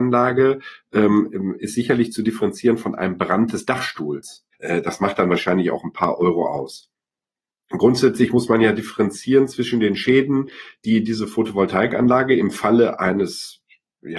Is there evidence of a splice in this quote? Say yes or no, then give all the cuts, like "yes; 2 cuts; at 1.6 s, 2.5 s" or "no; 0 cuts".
yes; 1 cut; at 4.5 s